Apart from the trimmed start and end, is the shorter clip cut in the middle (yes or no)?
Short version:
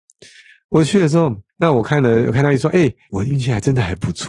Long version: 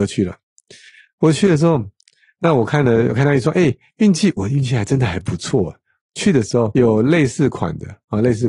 yes